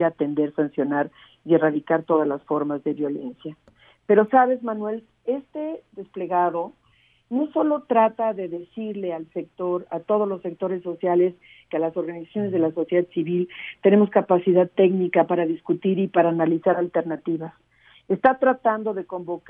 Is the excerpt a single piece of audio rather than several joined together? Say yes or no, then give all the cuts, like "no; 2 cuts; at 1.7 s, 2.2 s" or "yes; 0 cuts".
no; 1 cut; at 11.7 s